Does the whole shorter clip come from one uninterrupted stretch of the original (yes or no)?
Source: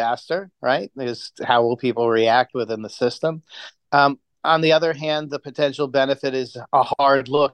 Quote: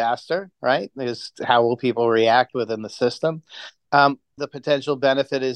no